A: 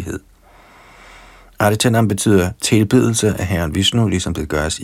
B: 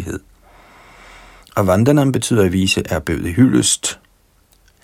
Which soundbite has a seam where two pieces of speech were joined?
B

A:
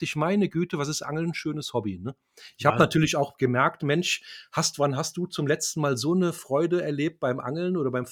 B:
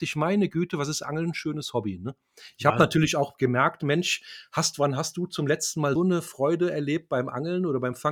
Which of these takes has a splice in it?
B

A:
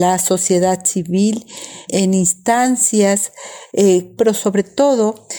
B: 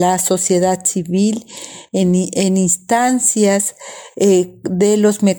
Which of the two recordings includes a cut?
A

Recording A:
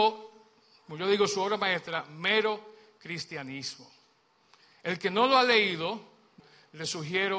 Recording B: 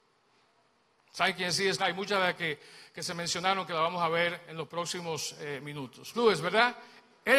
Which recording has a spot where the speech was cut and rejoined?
B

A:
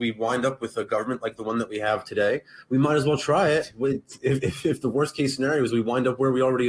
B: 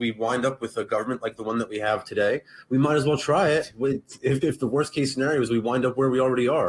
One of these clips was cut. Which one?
B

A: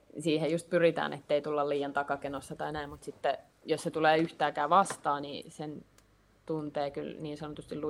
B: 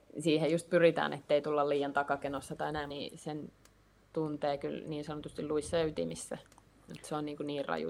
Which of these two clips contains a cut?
B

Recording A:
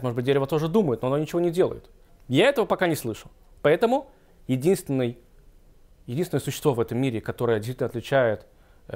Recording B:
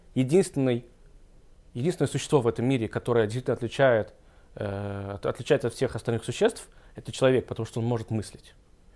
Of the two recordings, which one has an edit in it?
A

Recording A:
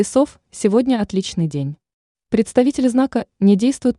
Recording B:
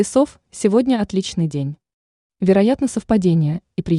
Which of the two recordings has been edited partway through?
A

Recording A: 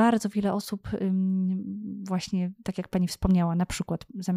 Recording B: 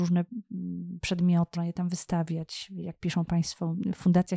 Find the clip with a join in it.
B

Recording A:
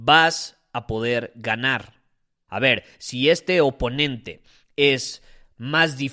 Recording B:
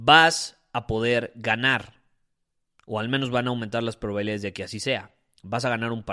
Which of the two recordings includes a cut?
A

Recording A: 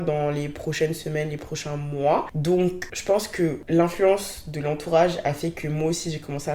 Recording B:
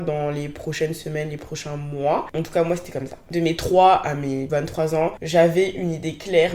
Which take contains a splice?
B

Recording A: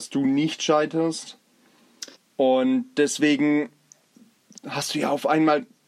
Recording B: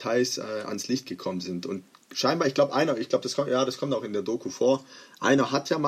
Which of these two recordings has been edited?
A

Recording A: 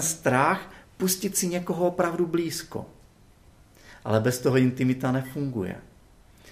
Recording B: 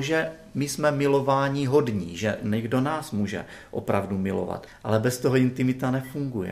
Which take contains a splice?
B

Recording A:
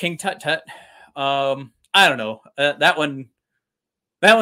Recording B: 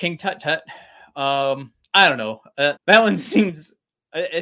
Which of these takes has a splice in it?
B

